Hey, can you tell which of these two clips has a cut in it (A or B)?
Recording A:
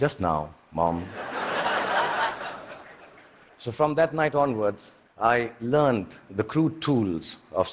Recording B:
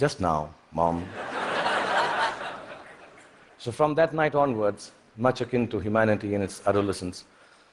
A